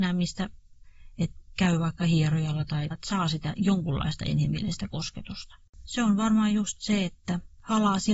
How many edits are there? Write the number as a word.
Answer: two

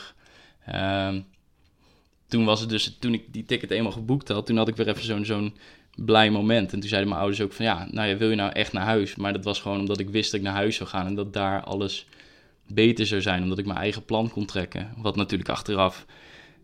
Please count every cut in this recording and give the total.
two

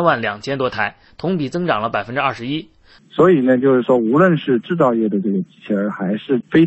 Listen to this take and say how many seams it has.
one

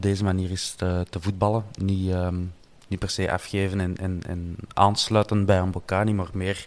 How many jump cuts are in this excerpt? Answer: zero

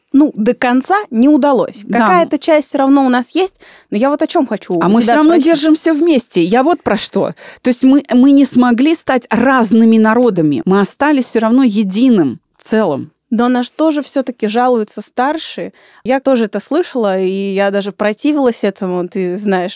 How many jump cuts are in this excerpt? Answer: one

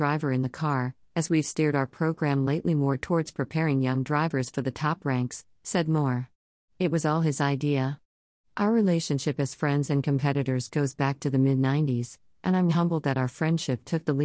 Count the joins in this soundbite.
two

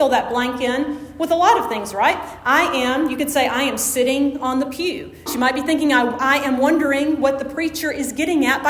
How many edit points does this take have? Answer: one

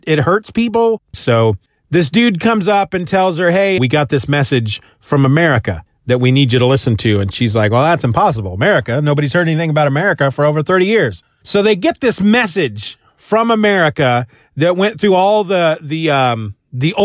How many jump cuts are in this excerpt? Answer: two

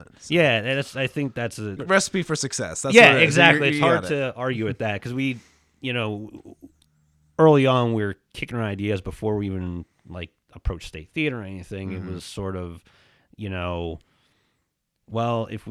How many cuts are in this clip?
one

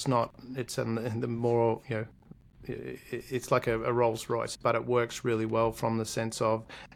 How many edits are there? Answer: one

